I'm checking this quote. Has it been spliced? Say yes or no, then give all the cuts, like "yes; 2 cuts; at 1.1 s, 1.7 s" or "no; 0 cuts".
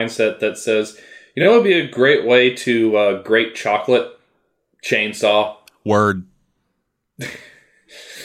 no; 0 cuts